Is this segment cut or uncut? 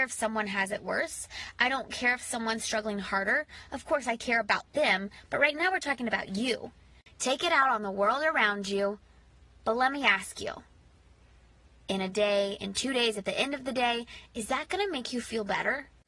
uncut